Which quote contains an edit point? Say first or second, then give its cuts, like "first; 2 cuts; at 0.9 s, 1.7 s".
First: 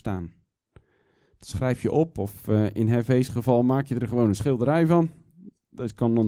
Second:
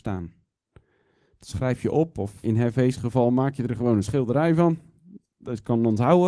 second; 1 cut; at 2.4 s